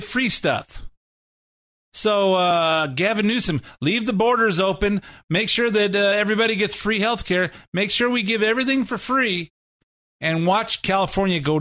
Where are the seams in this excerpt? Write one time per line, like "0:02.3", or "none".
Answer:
none